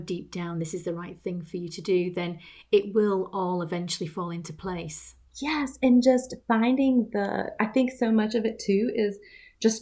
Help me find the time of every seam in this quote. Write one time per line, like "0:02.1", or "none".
none